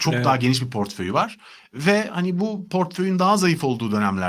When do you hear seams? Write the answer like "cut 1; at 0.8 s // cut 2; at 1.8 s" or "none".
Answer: none